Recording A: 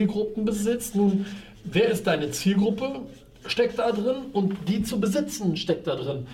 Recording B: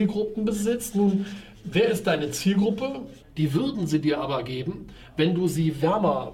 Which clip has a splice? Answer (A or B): B